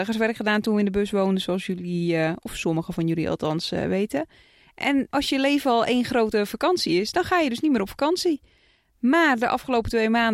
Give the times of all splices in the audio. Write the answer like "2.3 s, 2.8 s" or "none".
none